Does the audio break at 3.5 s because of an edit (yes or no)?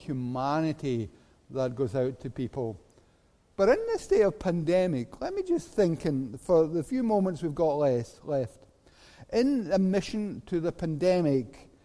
yes